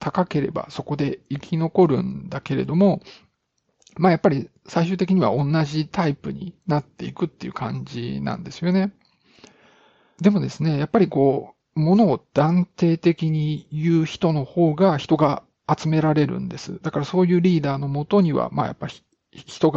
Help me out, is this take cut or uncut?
uncut